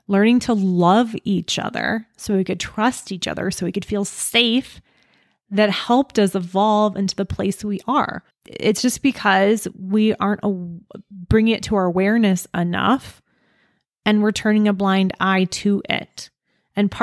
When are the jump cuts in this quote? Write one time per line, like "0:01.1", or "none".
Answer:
0:08.3